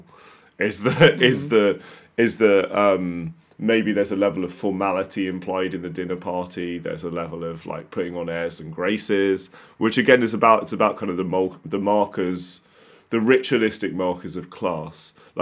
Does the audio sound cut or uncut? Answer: uncut